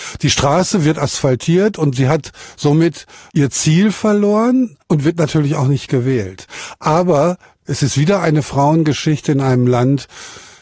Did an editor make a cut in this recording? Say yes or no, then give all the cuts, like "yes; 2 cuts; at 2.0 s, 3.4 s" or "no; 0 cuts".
yes; 1 cut; at 4.8 s